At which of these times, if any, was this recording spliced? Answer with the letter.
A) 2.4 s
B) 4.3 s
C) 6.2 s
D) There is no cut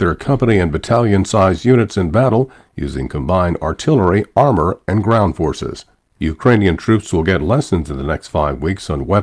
C